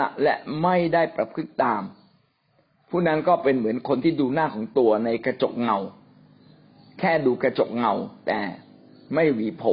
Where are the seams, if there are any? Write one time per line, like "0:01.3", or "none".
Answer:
none